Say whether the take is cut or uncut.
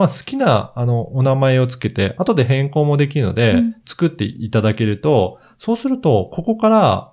uncut